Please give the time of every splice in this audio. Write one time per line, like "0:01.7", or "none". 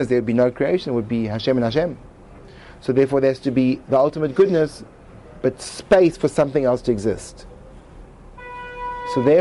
none